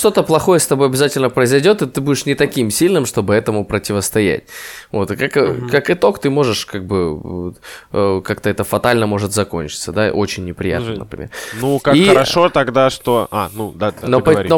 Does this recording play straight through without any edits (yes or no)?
yes